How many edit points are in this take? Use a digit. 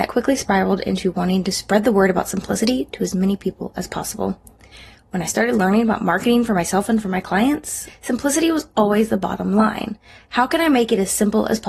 1